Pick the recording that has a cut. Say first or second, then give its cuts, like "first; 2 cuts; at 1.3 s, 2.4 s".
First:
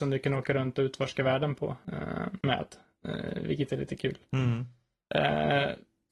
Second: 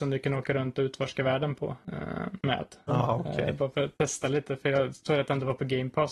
second; 1 cut; at 2.9 s